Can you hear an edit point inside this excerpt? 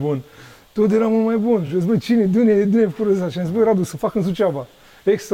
no; 0 cuts

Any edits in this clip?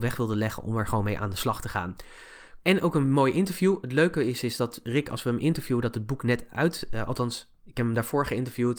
yes; 1 cut; at 2.6 s

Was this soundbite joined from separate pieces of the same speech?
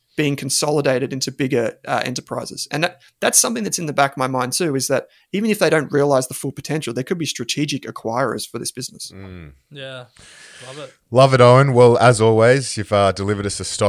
no; 0 cuts

